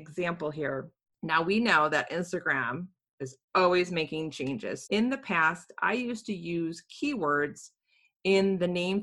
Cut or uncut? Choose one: cut